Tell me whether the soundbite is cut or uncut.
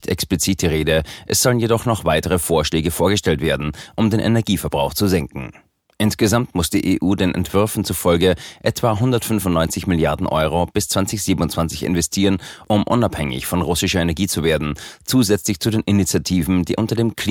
uncut